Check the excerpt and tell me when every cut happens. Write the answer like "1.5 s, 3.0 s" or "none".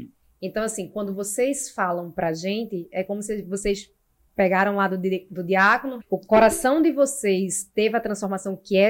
6.0 s